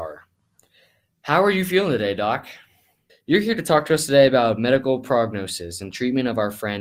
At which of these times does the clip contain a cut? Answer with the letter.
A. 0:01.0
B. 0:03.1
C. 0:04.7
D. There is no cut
B